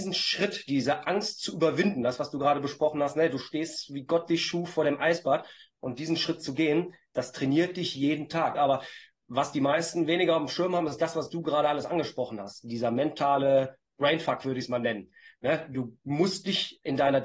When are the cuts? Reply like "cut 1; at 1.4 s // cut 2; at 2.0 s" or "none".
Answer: cut 1; at 8.5 s